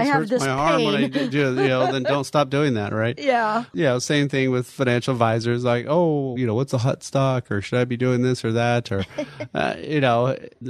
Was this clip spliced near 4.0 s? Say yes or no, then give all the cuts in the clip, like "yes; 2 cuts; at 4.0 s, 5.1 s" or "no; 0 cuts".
no; 1 cut; at 6.4 s